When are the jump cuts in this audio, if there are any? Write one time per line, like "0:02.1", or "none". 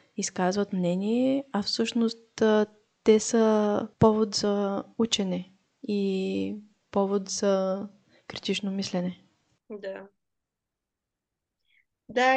none